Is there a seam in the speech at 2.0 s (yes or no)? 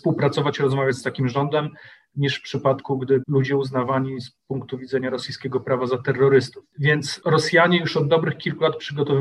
no